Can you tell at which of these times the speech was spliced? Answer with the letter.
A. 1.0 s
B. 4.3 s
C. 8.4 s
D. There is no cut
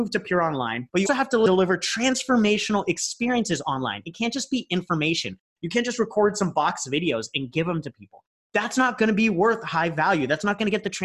A